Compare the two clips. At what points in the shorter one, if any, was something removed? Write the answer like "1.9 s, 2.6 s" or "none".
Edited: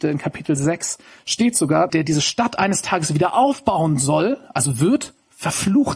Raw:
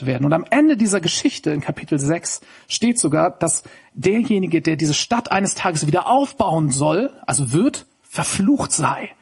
1.9 s

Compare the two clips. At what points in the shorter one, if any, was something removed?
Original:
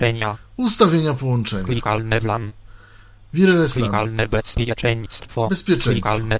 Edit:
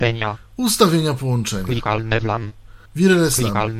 2.9 s

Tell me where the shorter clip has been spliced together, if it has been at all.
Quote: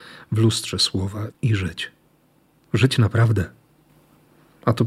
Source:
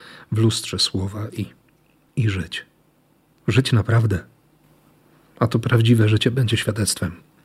1.3 s

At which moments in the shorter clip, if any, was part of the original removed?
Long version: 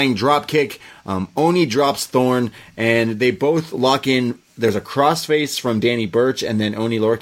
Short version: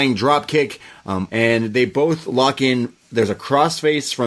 1.3 s

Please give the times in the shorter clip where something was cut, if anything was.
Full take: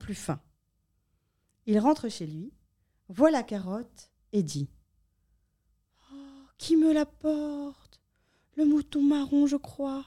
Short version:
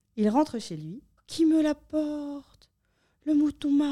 1.2 s

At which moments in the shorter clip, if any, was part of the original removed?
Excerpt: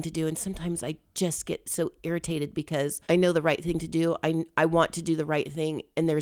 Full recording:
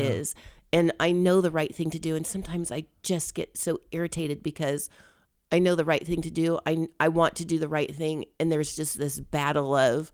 3.0 s

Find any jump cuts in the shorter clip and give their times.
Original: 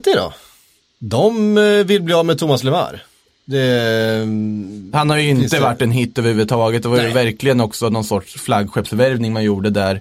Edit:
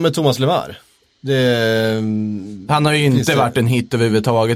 none

